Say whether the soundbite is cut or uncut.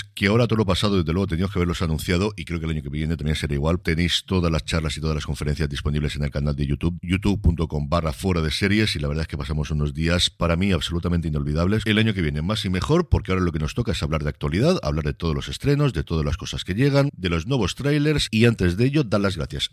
cut